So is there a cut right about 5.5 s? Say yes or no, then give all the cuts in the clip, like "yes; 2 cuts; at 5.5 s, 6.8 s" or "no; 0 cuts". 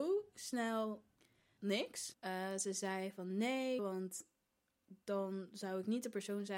no; 2 cuts; at 2.1 s, 3.8 s